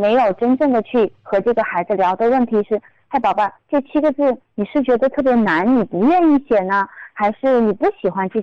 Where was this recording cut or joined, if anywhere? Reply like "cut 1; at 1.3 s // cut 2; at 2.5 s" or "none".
none